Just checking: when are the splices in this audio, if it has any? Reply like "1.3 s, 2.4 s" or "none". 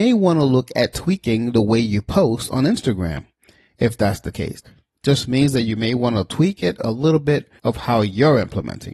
4.6 s, 7.6 s